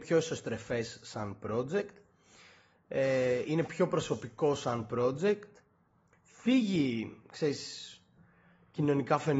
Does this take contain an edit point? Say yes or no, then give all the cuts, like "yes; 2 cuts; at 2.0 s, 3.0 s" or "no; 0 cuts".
no; 0 cuts